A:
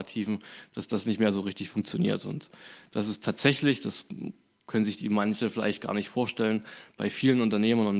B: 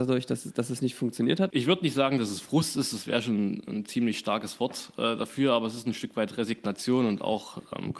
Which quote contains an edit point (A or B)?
B